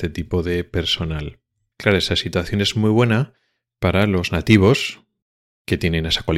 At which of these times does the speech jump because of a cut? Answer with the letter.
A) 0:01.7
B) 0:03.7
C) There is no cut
A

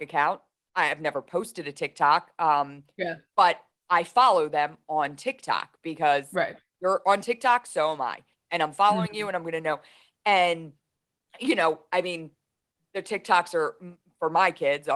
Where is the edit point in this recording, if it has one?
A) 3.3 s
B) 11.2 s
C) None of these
C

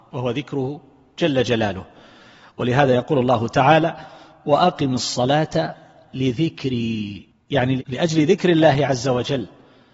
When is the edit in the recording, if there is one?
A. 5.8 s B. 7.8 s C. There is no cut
B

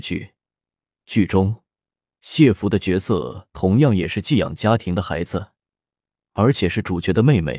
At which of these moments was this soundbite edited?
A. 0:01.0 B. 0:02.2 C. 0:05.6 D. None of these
D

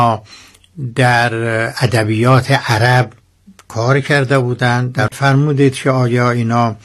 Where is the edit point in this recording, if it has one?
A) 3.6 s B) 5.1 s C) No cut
B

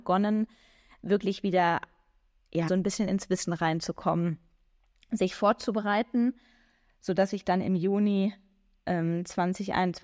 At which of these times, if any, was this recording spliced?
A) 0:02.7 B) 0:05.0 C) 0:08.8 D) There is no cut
A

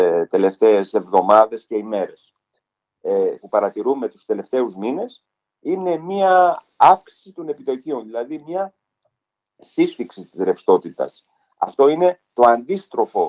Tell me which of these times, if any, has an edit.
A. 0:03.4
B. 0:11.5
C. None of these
A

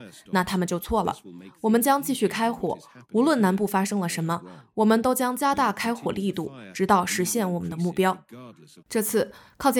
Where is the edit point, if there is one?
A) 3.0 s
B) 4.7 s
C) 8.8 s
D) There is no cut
C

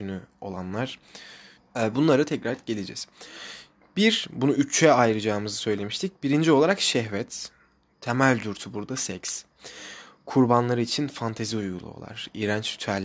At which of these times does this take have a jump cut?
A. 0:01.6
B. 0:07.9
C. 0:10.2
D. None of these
A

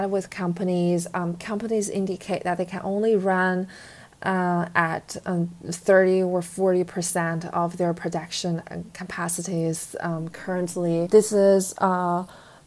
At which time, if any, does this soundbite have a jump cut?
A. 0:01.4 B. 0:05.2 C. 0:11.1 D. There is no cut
C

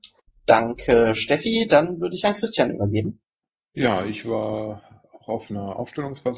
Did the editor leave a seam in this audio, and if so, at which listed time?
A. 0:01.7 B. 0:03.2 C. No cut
C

